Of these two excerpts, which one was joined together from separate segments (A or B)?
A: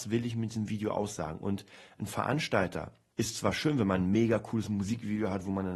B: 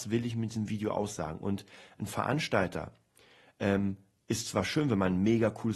A